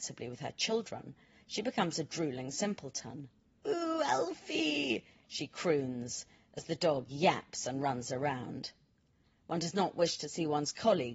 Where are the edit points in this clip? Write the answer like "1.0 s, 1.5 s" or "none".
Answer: 1.4 s